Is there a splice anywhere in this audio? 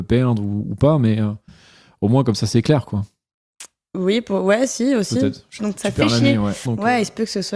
yes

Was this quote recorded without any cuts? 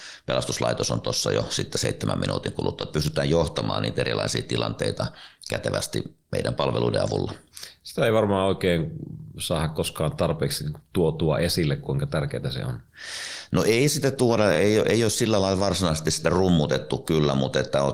yes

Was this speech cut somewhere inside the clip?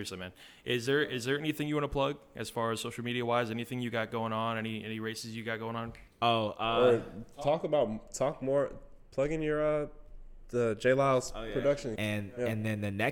yes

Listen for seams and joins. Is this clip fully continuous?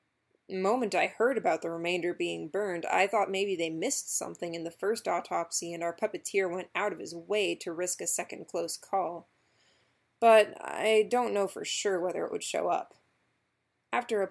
yes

